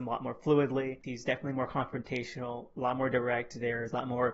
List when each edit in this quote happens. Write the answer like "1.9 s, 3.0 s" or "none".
1.0 s